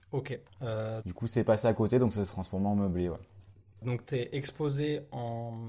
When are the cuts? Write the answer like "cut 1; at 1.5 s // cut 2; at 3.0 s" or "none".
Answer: cut 1; at 1.0 s // cut 2; at 3.8 s